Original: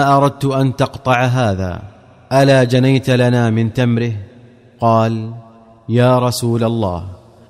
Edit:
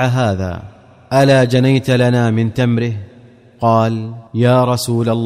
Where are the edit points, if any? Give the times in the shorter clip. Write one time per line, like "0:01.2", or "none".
0:04.3